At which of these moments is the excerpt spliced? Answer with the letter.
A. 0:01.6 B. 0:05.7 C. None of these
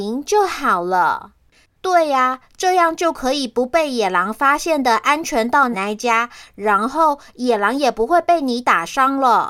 B